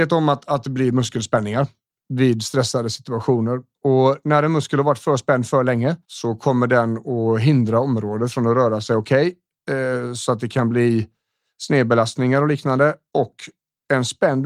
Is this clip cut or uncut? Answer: cut